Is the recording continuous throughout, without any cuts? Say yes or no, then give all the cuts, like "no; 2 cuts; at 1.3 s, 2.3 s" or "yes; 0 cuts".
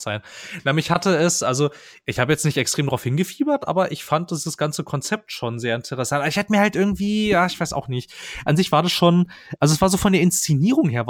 yes; 0 cuts